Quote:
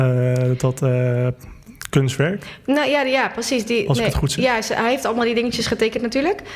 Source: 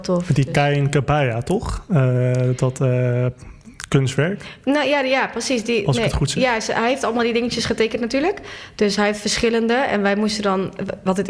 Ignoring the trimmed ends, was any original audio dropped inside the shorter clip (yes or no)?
no